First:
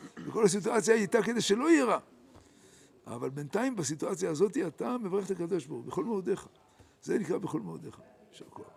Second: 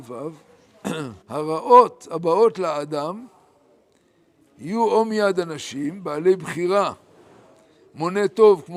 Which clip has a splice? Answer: second; 1 cut; at 1.2 s

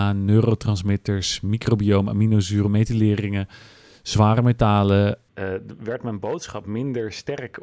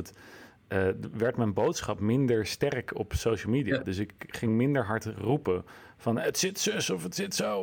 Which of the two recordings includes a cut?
first; 2 cuts; at 2.7 s, 5.3 s

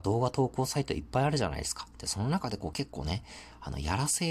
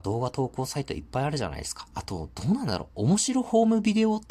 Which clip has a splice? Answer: second; 1 cut; at 1.9 s

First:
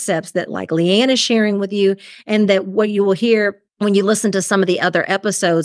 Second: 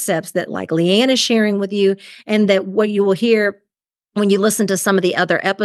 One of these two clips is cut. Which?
first; 1 cut; at 3.7 s

